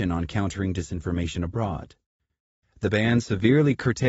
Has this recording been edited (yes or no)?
yes